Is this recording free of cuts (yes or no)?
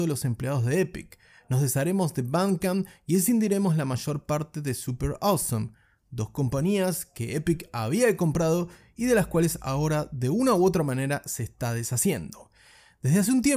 yes